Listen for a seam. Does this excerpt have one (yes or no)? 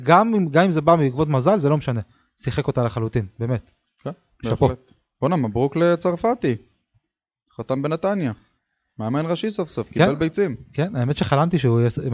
no